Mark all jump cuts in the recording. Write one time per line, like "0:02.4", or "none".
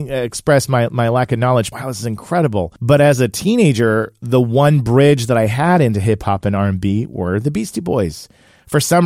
0:01.7
0:02.8